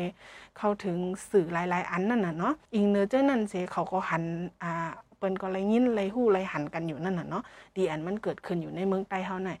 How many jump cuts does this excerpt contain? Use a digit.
1